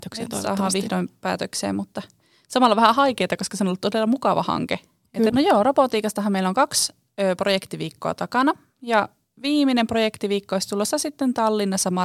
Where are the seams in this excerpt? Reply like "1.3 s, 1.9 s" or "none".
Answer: 5.3 s